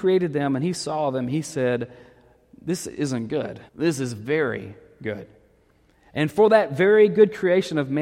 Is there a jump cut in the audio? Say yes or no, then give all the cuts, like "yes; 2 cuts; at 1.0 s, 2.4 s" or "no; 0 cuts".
yes; 1 cut; at 3.7 s